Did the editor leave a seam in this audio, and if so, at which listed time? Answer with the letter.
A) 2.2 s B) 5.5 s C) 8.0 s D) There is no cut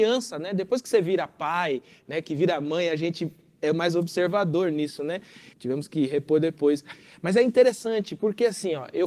B